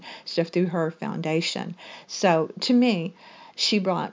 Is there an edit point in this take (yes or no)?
no